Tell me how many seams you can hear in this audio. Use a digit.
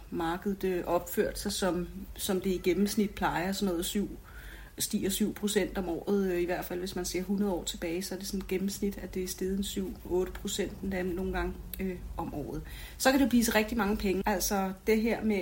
1